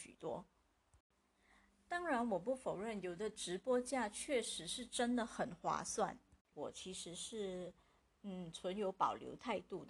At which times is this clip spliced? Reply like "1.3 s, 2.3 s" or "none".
6.5 s